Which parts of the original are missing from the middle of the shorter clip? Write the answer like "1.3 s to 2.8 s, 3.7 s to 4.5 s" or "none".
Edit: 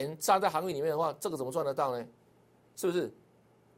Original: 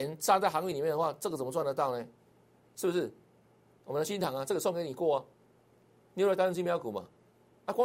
none